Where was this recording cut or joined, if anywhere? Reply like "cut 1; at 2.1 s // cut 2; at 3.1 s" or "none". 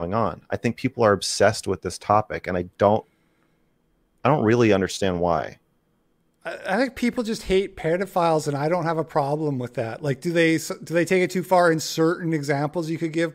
none